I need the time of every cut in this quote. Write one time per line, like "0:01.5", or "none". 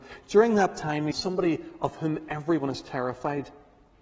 0:01.1